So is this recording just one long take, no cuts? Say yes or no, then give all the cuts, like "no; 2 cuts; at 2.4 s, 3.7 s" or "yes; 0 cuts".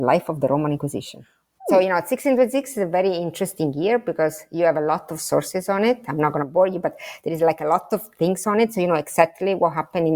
yes; 0 cuts